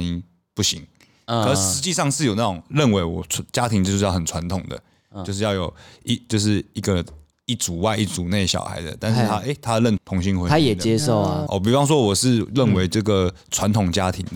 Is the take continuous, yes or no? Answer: no